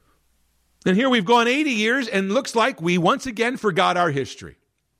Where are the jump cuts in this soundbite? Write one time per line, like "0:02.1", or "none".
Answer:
none